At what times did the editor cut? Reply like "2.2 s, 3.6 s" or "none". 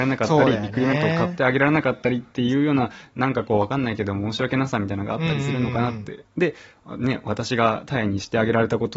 none

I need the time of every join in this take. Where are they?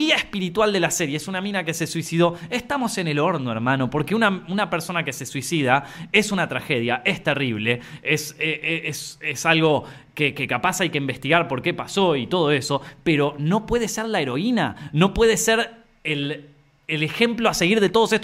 none

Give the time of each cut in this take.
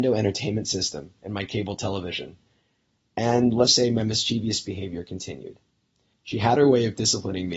3.7 s, 6.1 s

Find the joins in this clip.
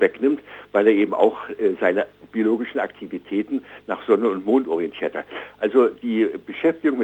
none

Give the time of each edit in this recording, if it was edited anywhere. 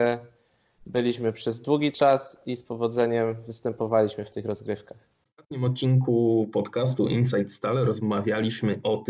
none

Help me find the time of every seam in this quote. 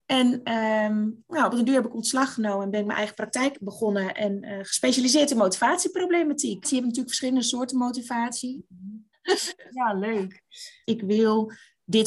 6.6 s, 9.1 s, 10.8 s

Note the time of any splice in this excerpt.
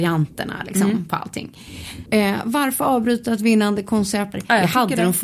2.1 s, 4.3 s

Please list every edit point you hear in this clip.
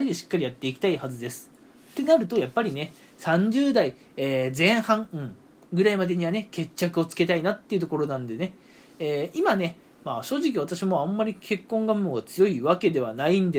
none

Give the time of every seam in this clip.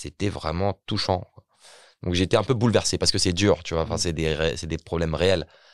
none

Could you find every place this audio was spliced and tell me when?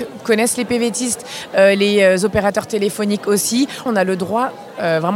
3.9 s

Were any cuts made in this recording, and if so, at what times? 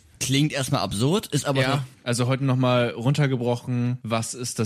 1.9 s

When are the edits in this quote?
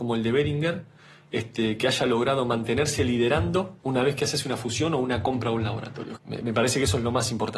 3.8 s, 6.2 s

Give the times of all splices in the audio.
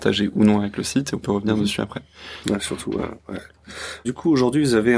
2.4 s, 4.0 s

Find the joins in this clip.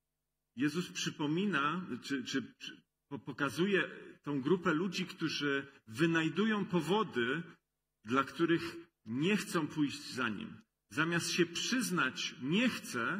none

